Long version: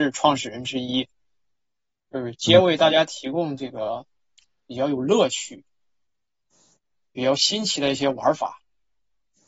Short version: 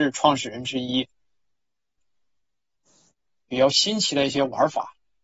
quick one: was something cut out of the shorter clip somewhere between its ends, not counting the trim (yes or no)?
yes